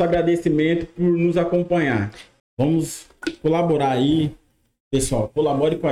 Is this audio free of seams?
no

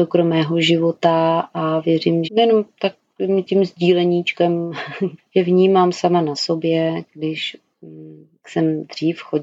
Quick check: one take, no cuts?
no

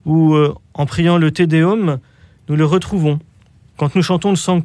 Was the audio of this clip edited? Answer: no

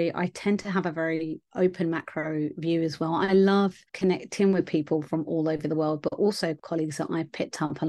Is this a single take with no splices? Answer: no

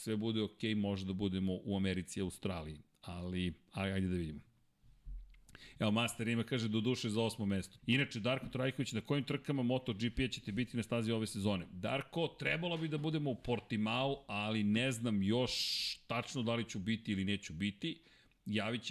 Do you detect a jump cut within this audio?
yes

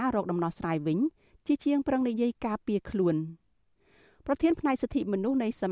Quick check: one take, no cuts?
yes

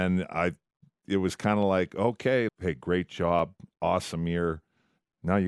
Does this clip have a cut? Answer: yes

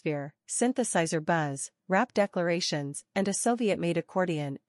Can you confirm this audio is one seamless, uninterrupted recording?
yes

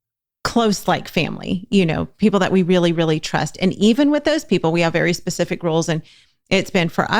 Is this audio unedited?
yes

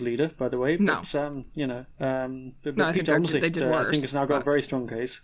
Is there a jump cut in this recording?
no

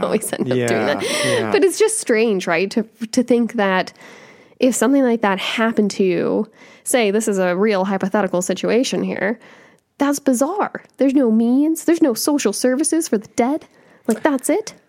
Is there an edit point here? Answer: no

